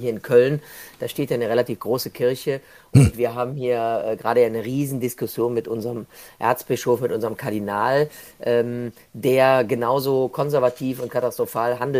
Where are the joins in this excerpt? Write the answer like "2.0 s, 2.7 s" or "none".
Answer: none